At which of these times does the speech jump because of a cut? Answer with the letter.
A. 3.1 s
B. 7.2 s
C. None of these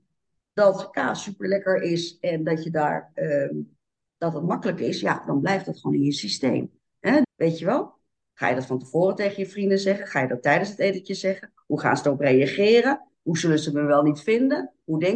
B